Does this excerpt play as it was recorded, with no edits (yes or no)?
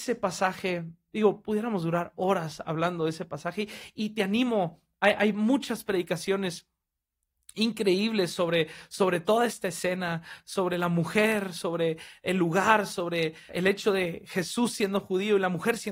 no